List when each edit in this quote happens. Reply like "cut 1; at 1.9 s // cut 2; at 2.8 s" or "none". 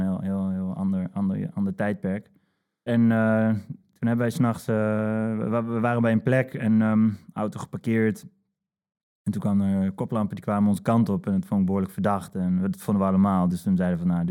cut 1; at 2.9 s